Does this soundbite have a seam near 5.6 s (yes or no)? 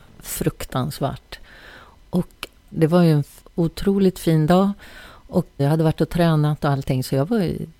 yes